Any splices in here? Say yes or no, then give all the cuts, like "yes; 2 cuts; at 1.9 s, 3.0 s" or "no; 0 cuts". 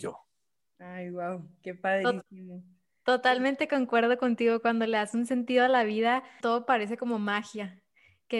yes; 1 cut; at 6.4 s